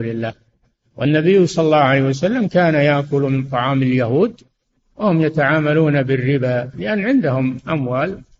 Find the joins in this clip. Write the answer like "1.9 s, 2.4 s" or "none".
none